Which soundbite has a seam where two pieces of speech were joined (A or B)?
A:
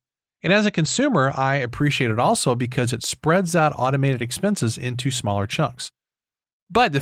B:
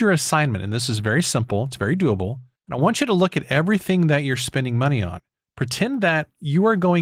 B